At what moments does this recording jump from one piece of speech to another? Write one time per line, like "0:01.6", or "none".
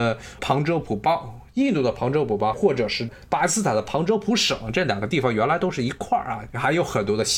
none